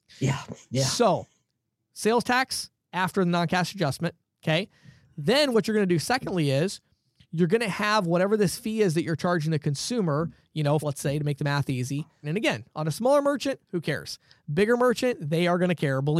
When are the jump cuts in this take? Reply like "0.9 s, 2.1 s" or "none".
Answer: 10.8 s, 12.2 s